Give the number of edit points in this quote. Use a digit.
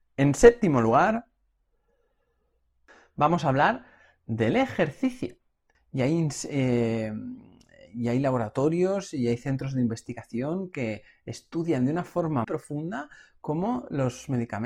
2